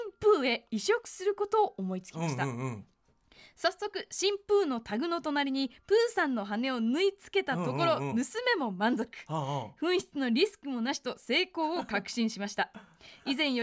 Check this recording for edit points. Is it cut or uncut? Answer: uncut